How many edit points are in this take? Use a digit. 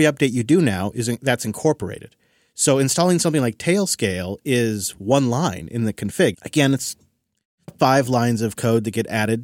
2